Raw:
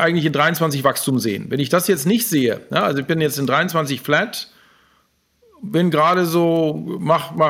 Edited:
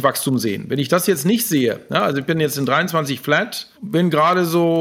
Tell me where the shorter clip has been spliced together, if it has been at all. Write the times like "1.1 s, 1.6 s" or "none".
3.7 s